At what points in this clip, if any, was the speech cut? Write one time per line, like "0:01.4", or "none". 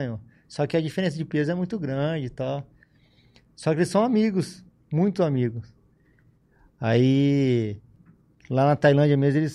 none

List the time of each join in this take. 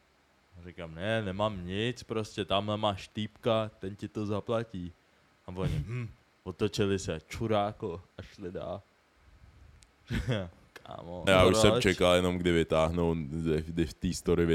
0:11.3

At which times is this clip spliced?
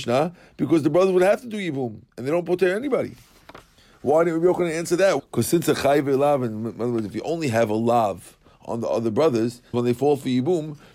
0:05.2
0:09.7

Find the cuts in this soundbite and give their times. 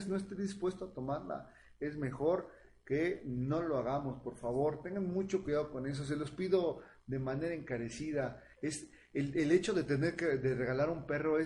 0:08.5

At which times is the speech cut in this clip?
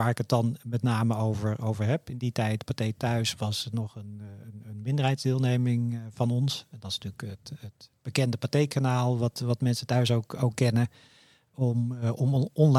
none

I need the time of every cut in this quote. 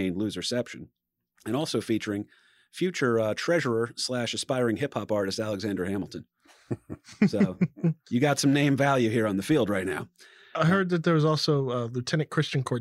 none

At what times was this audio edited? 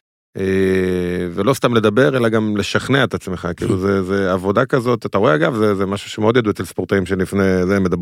none

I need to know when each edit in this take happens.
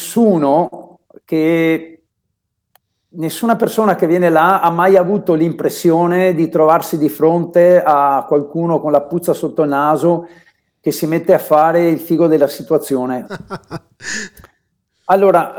0:13.2

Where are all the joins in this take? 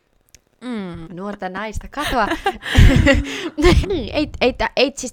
0:01.0
0:03.8

